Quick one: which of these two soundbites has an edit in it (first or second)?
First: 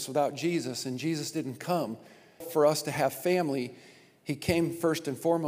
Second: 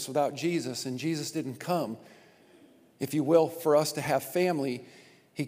first